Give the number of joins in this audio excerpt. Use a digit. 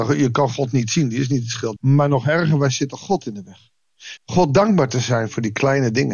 2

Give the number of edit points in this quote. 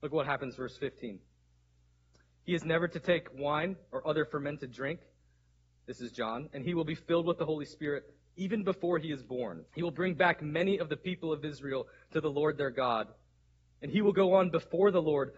1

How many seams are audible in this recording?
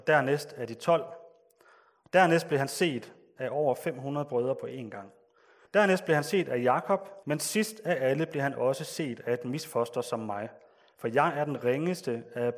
2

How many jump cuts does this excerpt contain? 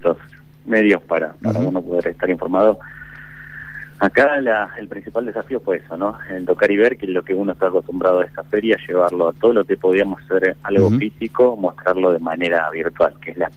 0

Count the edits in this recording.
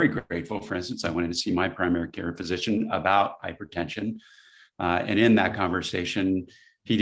0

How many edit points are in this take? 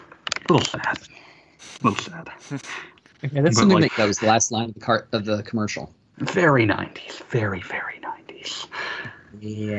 1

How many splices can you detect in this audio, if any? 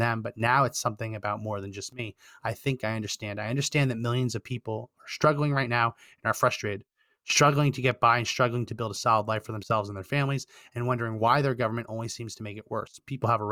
0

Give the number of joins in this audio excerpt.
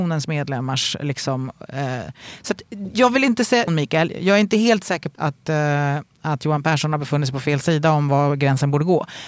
2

